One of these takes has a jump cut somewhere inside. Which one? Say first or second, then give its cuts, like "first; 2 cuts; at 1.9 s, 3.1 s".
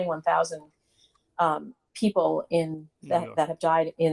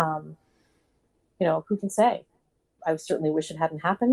first; 1 cut; at 2.9 s